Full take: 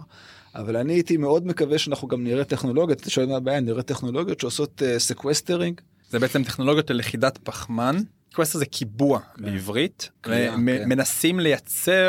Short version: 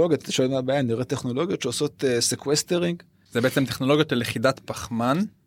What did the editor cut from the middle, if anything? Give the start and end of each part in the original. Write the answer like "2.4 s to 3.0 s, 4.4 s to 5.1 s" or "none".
none